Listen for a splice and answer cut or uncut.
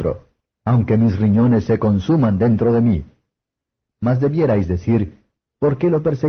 uncut